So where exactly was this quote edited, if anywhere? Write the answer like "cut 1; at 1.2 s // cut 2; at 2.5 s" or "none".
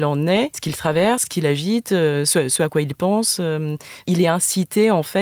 none